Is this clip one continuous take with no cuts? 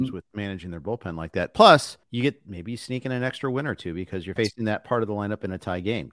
no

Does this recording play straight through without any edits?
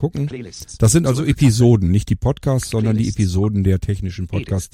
yes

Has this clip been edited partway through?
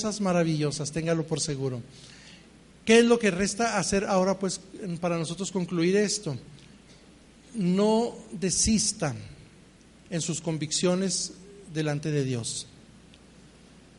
no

